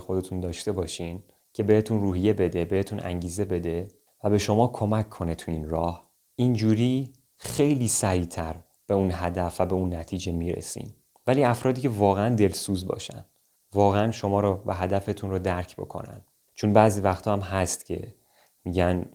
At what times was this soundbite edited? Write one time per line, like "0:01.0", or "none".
none